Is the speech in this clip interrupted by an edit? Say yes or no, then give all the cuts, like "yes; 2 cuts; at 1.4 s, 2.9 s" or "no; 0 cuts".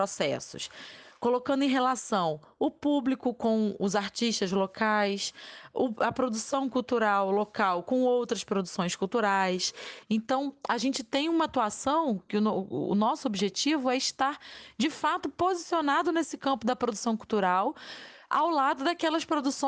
yes; 1 cut; at 10.0 s